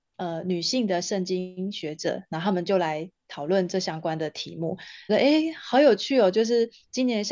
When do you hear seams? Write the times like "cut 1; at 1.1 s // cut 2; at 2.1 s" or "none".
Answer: cut 1; at 5.1 s